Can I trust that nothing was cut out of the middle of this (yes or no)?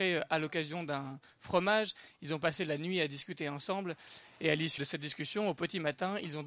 no